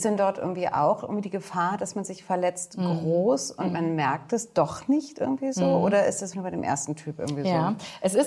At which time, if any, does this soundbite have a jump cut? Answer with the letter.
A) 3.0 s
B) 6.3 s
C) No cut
B